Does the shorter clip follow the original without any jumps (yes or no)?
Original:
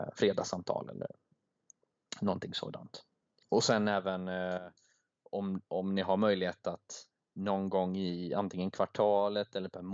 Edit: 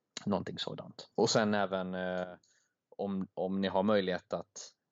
no